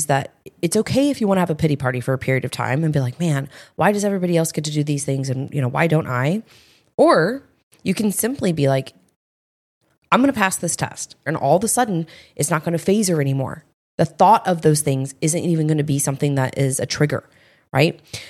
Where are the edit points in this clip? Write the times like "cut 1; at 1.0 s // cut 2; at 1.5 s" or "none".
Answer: cut 1; at 11.3 s

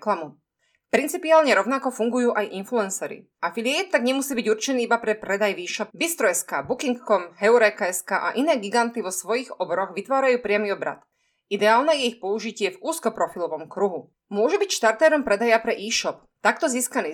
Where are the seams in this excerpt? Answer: cut 1; at 3.3 s // cut 2; at 5.9 s // cut 3; at 14.2 s

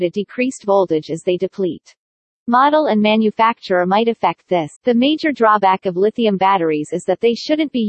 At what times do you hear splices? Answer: cut 1; at 4.8 s

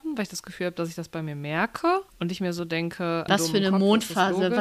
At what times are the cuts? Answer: cut 1; at 2.1 s // cut 2; at 3.3 s

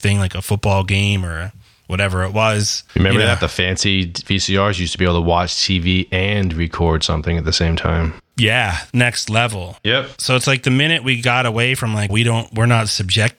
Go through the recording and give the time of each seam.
cut 1; at 8.9 s // cut 2; at 12.1 s

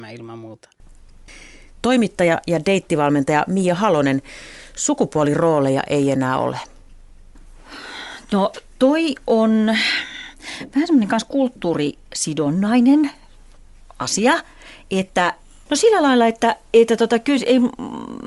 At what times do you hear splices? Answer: cut 1; at 15.7 s

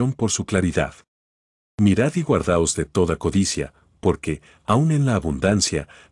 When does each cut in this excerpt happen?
none

